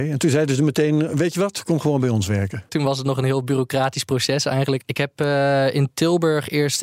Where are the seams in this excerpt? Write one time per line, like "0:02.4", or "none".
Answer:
0:02.7
0:04.8